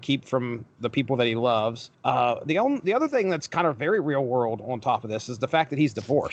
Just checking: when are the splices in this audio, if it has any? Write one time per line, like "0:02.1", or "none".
none